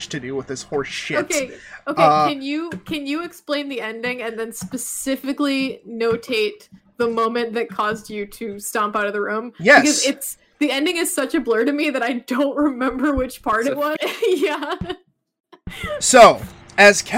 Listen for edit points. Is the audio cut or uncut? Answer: cut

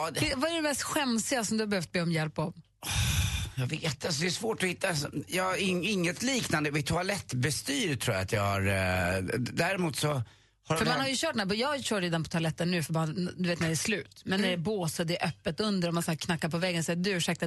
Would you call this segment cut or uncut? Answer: uncut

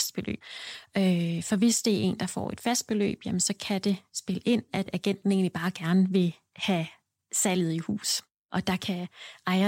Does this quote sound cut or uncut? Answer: uncut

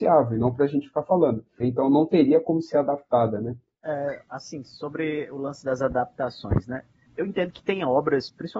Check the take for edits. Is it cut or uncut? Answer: cut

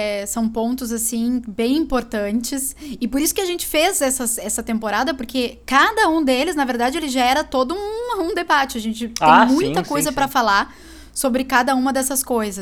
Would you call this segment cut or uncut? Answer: uncut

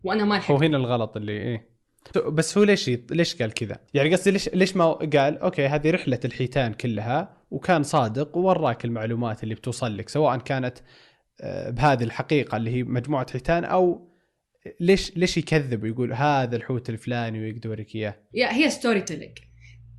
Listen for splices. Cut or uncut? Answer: cut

